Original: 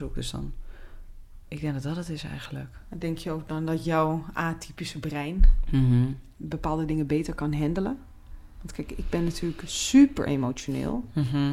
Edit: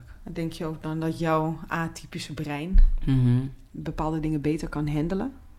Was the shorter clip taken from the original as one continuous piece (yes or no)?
yes